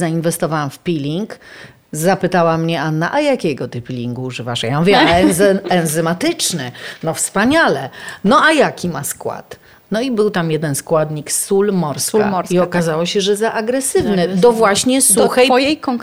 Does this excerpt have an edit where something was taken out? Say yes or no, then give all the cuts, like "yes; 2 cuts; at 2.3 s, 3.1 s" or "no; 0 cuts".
no; 0 cuts